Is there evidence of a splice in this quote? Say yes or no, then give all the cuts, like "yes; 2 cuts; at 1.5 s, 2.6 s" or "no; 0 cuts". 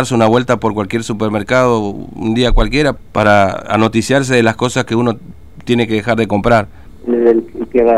yes; 2 cuts; at 3.0 s, 6.9 s